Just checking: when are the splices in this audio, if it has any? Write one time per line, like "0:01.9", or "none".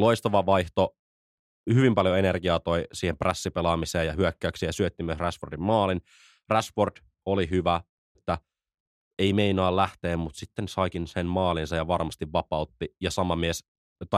0:08.1